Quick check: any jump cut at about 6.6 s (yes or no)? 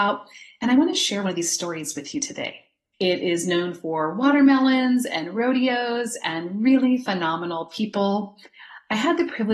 no